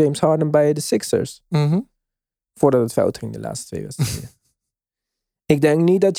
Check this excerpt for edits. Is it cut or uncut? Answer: uncut